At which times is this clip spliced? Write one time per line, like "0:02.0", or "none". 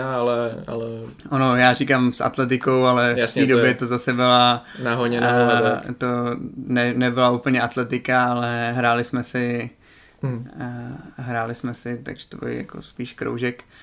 0:12.4